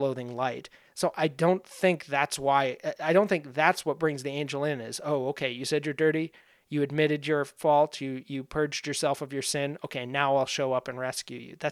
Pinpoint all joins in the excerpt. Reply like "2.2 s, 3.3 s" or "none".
none